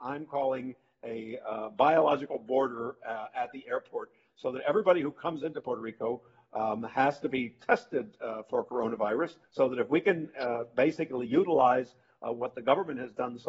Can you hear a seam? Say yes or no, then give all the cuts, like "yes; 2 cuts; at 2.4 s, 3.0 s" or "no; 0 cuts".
yes; 1 cut; at 9.4 s